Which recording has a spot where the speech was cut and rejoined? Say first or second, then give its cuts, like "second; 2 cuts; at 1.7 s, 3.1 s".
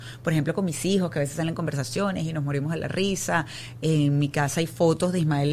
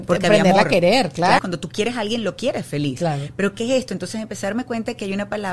second; 1 cut; at 1.4 s